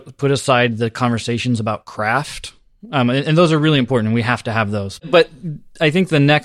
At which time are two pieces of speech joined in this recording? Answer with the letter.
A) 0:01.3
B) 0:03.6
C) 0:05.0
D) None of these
C